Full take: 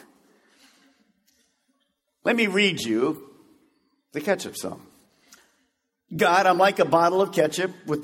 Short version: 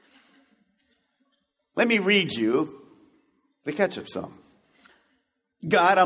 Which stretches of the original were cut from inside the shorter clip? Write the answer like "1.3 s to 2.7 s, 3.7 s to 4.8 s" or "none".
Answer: none